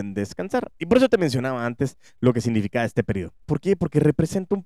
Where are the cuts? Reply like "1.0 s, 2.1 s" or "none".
3.4 s